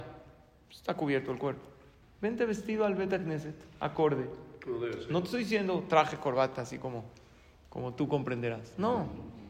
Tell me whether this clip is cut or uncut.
cut